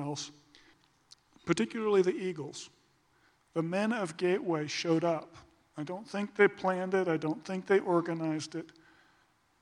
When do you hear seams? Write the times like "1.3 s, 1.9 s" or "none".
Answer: 3.4 s

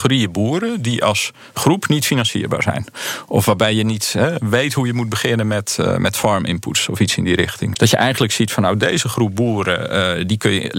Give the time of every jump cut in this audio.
7.7 s

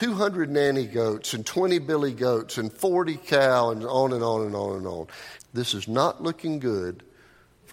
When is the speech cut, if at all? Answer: 5.4 s

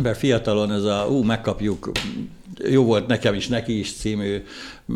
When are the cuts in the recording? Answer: none

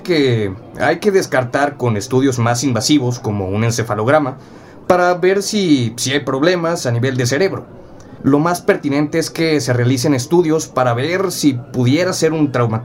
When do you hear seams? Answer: 8.2 s

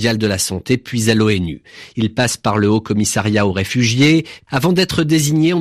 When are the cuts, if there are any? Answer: 4.5 s

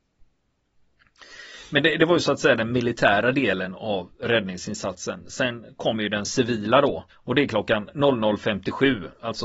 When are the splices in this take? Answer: 7.1 s

